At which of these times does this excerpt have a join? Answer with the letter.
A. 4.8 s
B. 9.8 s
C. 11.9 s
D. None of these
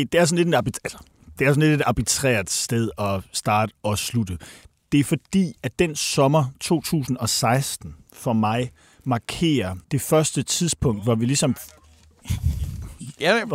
B